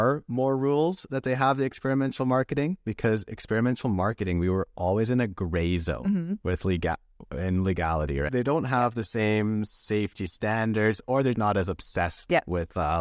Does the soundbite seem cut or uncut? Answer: cut